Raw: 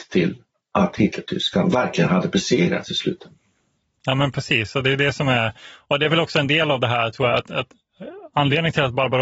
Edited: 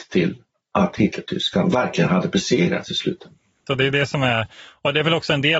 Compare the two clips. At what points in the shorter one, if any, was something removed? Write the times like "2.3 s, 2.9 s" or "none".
3.7 s